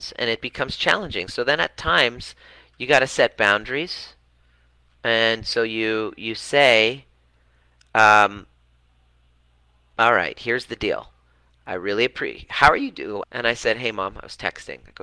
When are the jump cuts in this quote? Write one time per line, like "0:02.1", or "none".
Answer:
0:13.2